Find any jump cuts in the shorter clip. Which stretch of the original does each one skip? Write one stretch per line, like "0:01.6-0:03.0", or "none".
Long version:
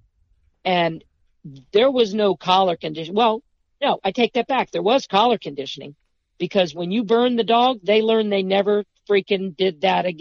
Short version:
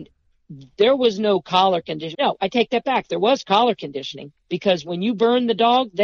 0:03.1-0:03.8
0:06.0-0:06.3